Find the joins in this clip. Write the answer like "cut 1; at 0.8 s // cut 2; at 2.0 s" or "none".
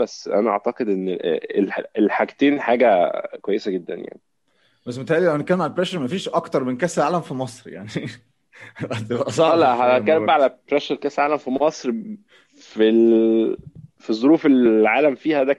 cut 1; at 10.7 s